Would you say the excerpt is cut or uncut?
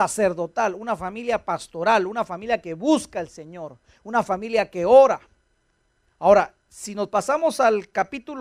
uncut